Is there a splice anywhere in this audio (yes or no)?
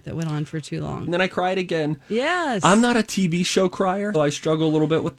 yes